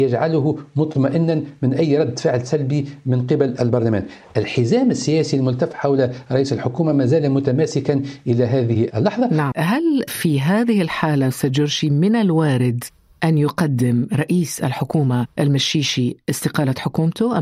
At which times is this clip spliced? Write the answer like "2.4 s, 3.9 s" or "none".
9.5 s